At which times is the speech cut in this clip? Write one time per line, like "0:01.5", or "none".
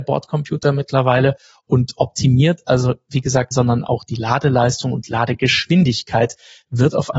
0:03.5